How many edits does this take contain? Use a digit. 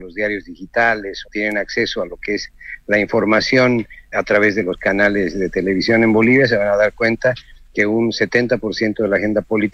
2